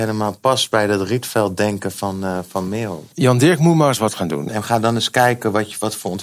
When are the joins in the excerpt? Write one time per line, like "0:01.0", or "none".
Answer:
0:03.1
0:04.5